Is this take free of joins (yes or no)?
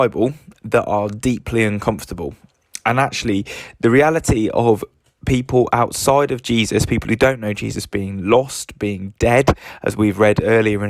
yes